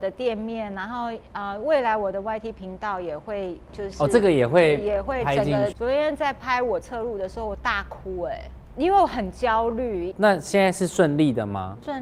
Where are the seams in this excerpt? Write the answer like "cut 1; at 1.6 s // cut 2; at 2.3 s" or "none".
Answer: cut 1; at 5.7 s // cut 2; at 10.1 s